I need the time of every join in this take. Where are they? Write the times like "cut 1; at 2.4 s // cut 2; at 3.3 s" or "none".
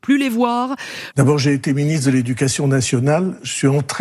cut 1; at 1.1 s

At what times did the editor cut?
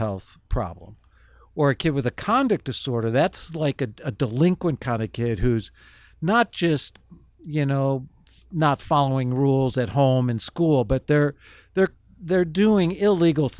none

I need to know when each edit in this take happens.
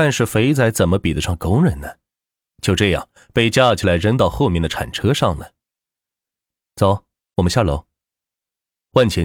none

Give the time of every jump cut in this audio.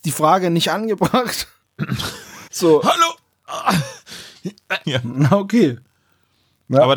cut 1; at 2.5 s // cut 2; at 4.8 s

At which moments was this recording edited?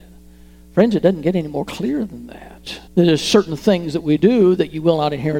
cut 1; at 2.9 s

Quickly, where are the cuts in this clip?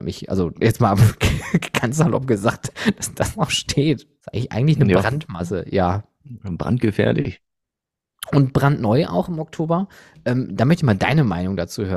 none

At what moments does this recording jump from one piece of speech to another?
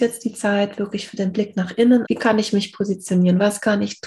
cut 1; at 2.0 s

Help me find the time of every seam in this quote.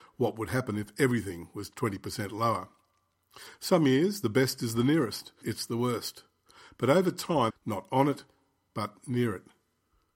cut 1; at 5.4 s // cut 2; at 7.5 s

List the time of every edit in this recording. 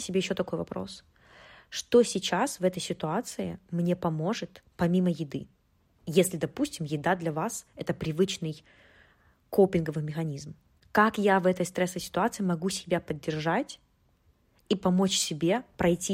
none

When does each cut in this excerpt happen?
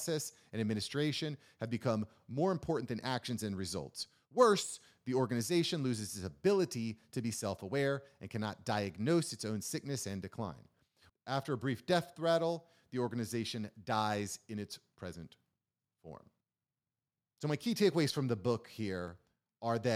cut 1; at 11.1 s

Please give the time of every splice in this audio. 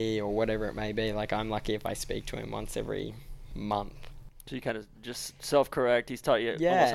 none

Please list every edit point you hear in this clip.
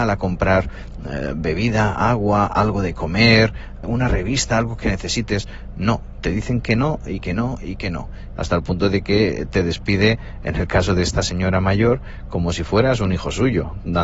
cut 1; at 3.8 s // cut 2; at 8.4 s

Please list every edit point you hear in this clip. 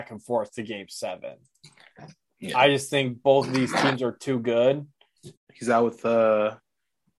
cut 1; at 5.3 s

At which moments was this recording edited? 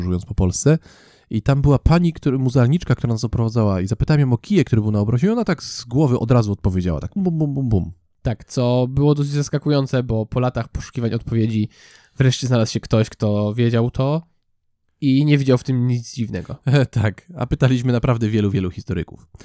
cut 1; at 7.2 s

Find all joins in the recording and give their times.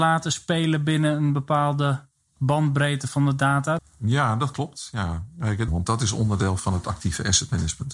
cut 1; at 3.8 s // cut 2; at 5.7 s

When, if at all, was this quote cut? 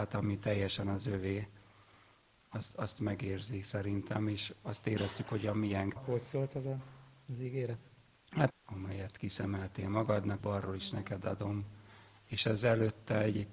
cut 1; at 6.0 s // cut 2; at 8.5 s // cut 3; at 10.4 s

